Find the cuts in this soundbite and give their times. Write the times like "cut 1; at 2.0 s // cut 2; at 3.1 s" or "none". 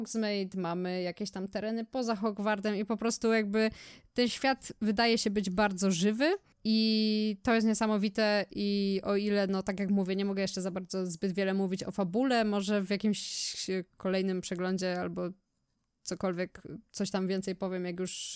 none